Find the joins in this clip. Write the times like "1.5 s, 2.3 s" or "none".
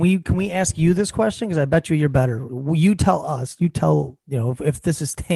none